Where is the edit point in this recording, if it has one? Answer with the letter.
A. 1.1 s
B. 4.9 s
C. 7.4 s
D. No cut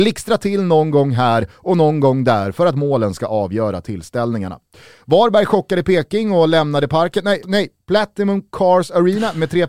C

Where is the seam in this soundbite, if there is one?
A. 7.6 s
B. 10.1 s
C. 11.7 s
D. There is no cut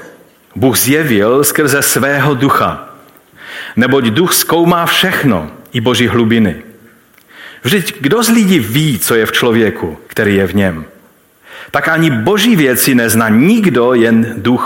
B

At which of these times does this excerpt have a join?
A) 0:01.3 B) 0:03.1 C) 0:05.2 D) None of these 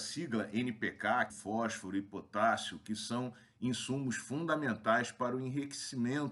A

